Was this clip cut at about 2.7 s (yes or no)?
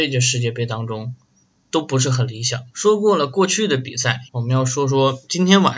yes